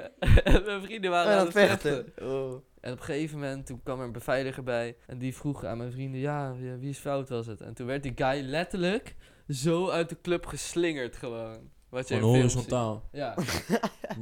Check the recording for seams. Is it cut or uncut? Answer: cut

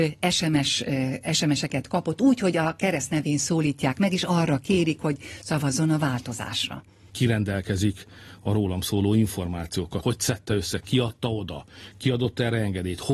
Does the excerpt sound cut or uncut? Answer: cut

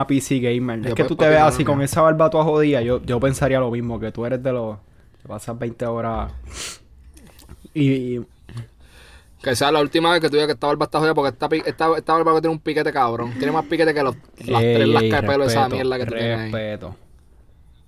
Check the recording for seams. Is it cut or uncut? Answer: uncut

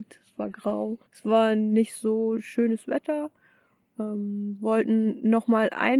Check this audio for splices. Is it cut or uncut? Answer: cut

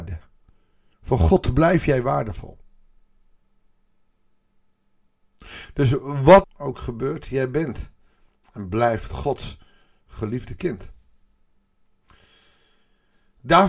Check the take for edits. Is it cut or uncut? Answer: cut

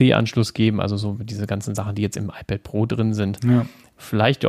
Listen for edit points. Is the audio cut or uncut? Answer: uncut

